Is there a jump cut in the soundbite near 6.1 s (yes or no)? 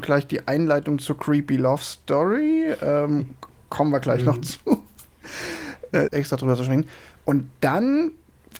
yes